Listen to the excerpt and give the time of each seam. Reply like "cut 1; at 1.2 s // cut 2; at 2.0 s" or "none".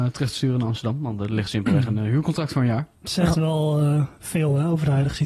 none